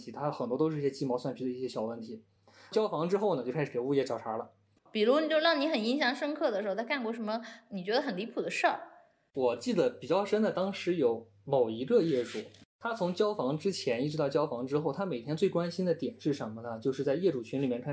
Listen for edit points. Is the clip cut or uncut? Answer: uncut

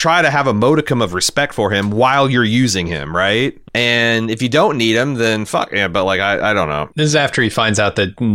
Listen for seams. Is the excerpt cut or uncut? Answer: cut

